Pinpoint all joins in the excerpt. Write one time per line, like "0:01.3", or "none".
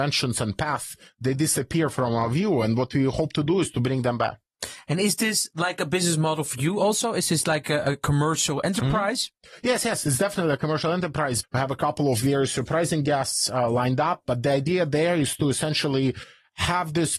0:11.4